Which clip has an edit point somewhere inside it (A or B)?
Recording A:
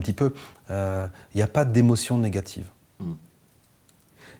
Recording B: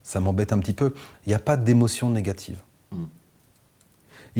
B